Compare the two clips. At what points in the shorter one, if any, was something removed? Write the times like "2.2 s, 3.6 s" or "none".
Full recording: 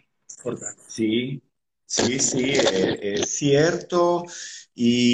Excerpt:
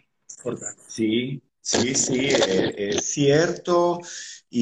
1.5 s